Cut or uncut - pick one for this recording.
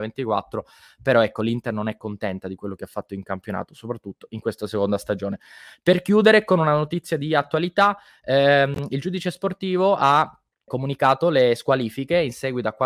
cut